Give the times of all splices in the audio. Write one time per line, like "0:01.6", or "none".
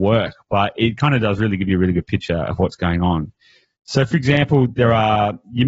none